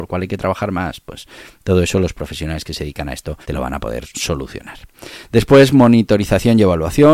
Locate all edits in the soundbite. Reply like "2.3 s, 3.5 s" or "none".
3.4 s

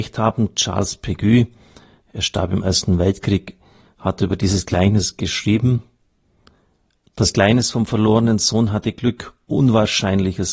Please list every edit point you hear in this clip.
none

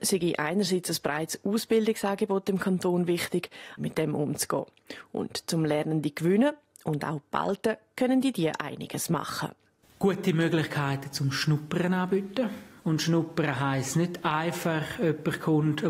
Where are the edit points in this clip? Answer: 3.8 s

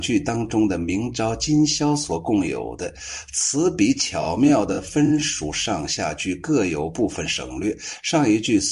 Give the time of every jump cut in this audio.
none

